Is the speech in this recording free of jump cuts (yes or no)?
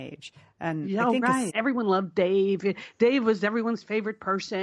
no